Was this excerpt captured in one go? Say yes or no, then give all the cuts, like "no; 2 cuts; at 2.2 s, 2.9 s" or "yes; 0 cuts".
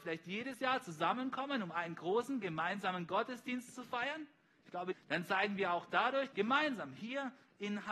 no; 2 cuts; at 4.9 s, 6.3 s